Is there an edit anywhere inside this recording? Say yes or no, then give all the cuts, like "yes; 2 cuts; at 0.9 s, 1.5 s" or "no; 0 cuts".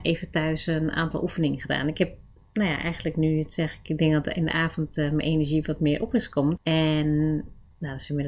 yes; 1 cut; at 6.6 s